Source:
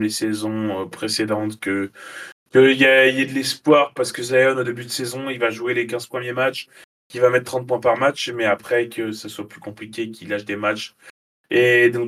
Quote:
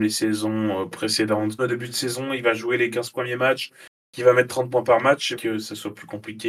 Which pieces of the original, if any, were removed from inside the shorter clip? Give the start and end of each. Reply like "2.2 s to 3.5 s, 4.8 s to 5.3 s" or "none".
1.6 s to 4.5 s, 8.3 s to 8.9 s